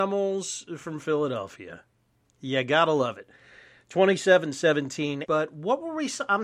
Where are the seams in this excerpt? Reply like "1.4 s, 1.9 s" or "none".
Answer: 5.2 s

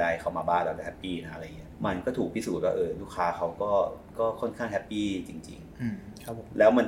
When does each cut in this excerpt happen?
1.8 s, 4.1 s

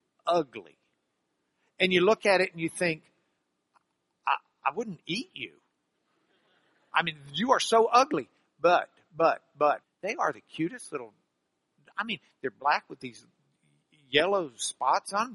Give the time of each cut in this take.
9.8 s

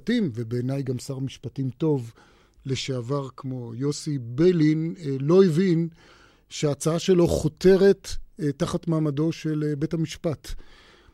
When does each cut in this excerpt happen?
none

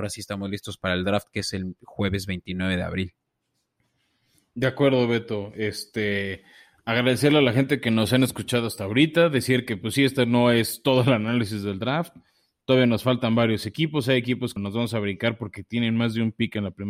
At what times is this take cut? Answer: 14.6 s

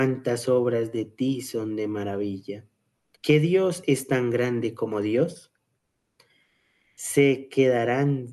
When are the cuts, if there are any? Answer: 3.1 s, 6.8 s

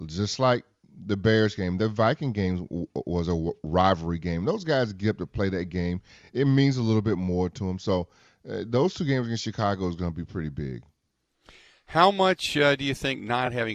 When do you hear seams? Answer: none

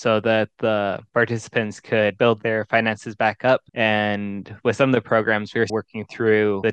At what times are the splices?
3.7 s, 5.7 s

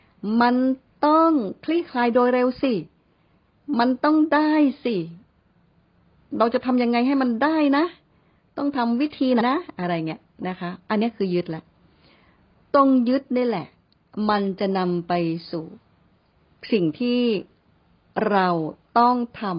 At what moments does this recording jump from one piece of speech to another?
9.4 s

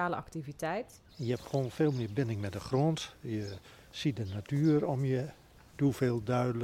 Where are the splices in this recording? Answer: 1.1 s

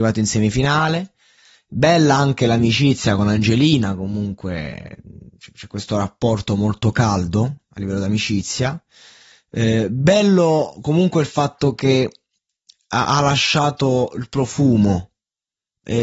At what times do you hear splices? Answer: none

